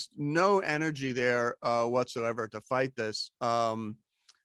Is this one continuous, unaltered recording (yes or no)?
no